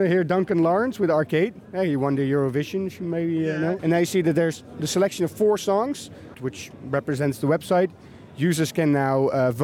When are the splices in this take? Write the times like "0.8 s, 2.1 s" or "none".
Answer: 3.8 s, 6.3 s